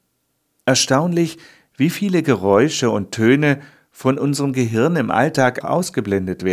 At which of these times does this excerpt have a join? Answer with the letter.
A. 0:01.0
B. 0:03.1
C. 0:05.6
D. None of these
C